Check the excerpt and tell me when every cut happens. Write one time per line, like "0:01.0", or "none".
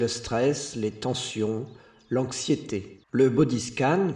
0:03.0